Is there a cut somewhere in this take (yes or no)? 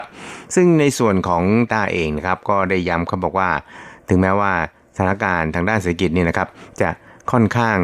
yes